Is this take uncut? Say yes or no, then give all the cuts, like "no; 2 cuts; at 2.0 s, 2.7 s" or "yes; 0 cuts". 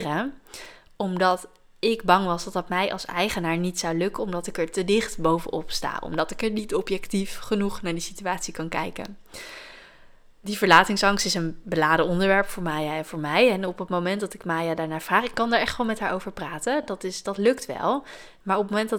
yes; 0 cuts